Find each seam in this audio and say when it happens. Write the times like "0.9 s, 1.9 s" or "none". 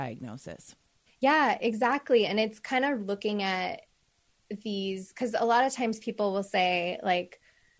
1.1 s, 3.0 s